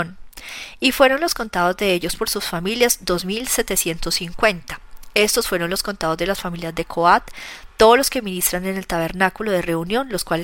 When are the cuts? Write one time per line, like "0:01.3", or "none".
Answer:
none